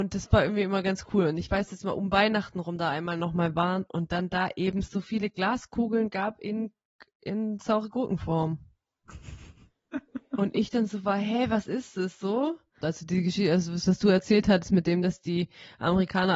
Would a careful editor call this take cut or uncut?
cut